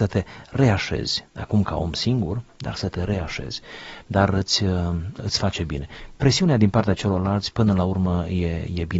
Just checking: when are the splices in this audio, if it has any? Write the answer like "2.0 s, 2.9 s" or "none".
4.0 s